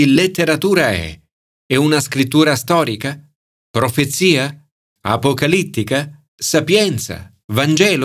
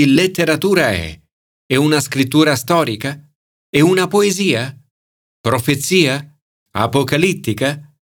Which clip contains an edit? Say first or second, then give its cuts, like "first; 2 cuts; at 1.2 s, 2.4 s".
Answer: first; 2 cuts; at 3.5 s, 6.3 s